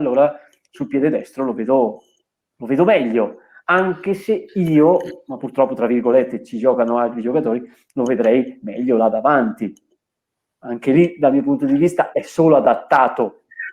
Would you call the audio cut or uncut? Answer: cut